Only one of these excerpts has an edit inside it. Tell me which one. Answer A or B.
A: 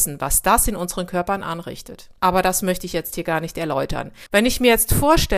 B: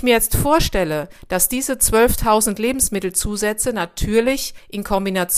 A